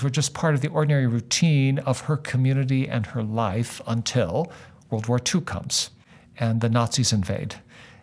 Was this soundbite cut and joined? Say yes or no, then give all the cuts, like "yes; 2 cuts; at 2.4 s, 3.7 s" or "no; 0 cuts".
no; 0 cuts